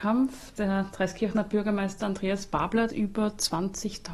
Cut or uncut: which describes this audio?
cut